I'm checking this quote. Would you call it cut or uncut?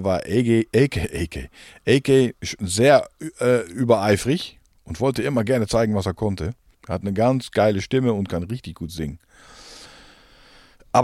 cut